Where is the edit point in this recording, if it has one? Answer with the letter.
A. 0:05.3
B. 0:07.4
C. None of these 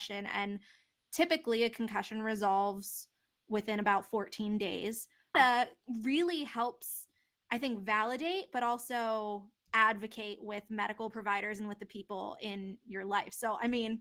A